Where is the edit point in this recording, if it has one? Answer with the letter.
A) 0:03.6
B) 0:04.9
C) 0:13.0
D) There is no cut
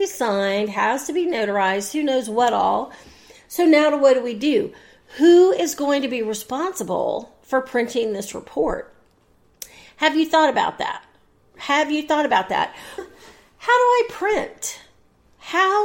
C